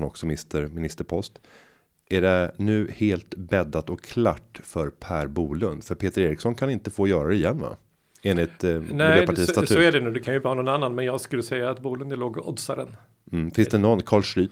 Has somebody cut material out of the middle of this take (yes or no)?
no